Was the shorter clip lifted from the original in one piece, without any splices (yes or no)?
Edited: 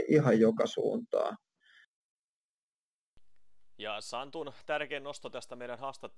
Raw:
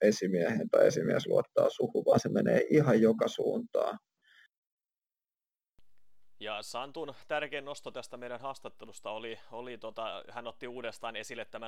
yes